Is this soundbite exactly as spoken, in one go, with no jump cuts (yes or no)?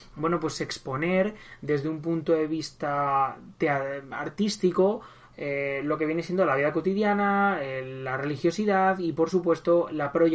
yes